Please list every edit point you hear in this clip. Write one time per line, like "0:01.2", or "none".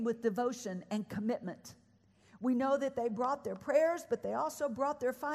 none